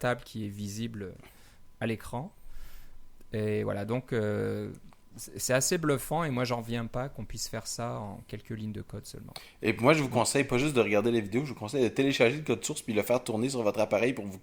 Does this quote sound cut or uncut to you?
uncut